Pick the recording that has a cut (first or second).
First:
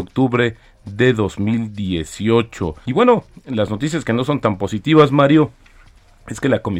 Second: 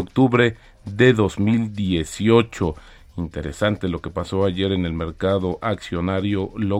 first